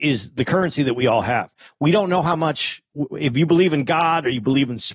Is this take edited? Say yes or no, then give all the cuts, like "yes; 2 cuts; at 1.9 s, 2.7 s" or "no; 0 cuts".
no; 0 cuts